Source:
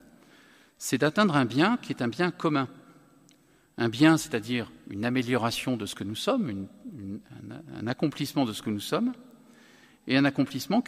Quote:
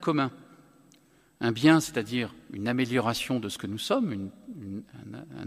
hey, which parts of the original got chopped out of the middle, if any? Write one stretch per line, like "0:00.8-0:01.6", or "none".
none